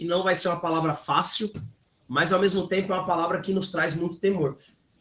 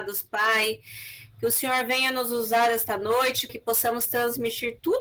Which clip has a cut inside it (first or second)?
second